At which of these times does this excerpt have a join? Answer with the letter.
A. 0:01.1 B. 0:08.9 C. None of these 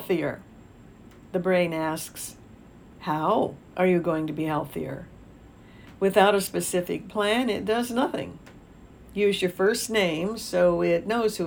B